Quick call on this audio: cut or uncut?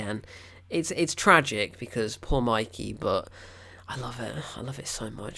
uncut